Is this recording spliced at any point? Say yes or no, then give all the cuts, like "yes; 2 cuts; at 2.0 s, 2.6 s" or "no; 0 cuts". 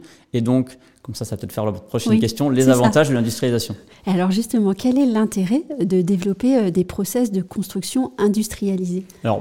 no; 0 cuts